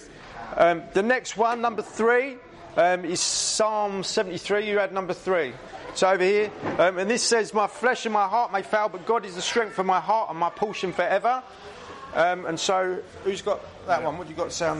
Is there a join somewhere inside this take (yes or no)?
no